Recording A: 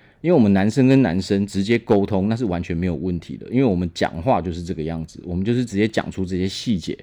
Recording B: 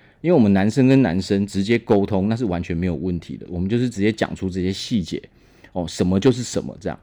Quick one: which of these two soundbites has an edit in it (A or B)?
B